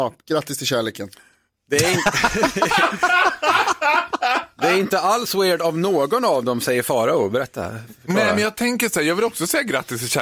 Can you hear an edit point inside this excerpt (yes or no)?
no